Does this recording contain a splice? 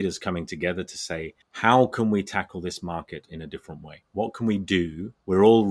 no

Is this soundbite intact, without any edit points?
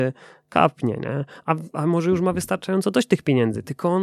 yes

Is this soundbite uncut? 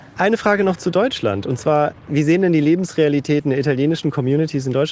yes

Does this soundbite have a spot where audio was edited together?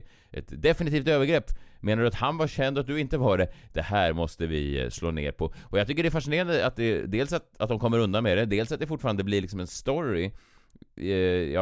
no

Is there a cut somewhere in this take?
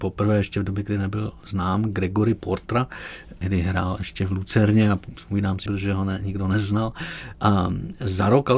yes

